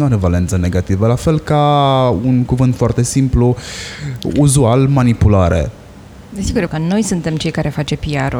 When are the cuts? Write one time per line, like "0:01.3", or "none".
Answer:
0:06.7